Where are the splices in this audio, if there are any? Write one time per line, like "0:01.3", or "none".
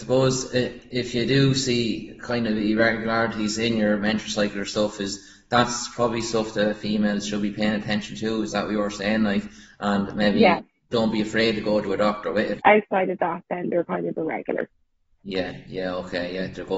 0:10.9
0:12.6